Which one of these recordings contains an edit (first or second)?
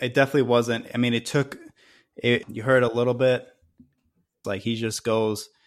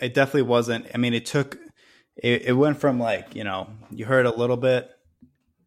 first